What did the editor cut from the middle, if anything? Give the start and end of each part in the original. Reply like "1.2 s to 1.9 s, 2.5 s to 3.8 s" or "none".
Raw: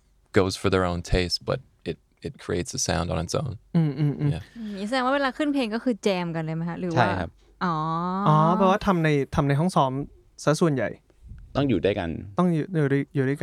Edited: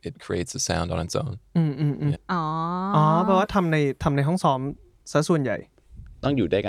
4.3 s to 7.5 s

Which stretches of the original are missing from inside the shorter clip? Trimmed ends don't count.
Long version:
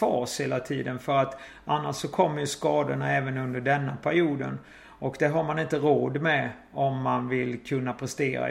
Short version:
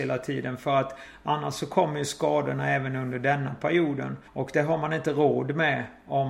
4.7 s to 4.9 s

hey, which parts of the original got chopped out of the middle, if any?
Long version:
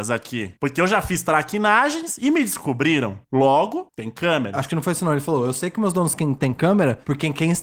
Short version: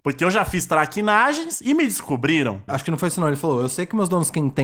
3.2 s to 4.5 s

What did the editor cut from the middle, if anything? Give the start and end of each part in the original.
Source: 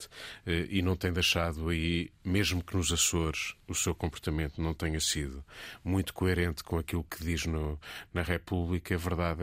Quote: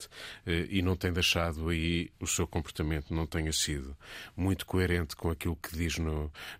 2.1 s to 3.6 s

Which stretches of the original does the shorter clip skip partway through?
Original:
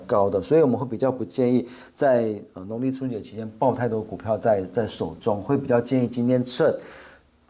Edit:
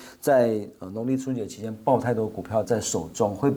4.4 s to 4.7 s

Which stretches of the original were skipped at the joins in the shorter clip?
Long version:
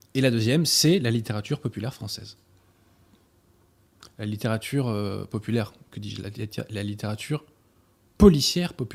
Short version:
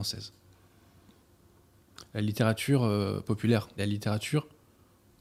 5.8 s to 6.7 s

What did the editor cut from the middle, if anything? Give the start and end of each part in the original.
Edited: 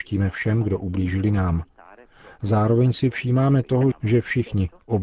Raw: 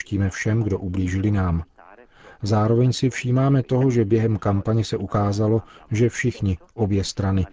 3.9 s to 5.8 s

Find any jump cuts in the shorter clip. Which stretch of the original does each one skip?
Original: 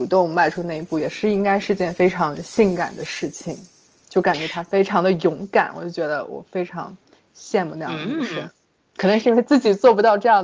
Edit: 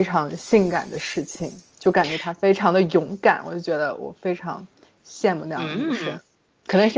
3.7 s to 4.0 s

